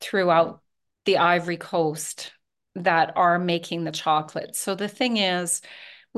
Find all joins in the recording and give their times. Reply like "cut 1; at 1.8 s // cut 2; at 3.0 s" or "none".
none